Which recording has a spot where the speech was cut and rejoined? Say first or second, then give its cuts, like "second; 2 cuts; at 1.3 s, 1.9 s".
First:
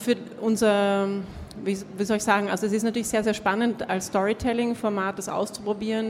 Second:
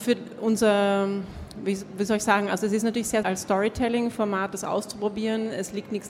second; 1 cut; at 3.2 s